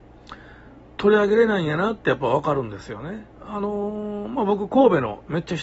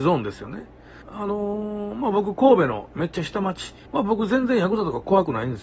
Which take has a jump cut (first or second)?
second